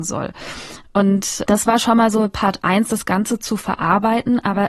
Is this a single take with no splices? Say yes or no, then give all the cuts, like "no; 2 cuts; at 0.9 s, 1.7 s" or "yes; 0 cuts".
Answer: no; 1 cut; at 1.5 s